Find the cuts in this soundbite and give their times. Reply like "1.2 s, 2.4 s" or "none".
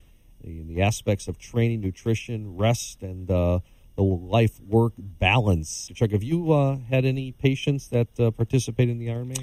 5.9 s